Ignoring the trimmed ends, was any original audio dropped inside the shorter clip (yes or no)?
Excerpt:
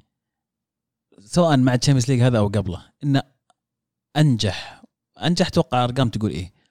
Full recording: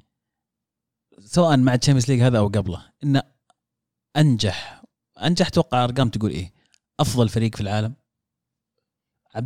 no